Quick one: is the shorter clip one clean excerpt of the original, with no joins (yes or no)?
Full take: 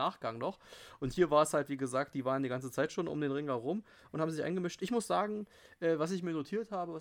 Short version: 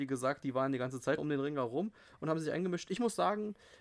no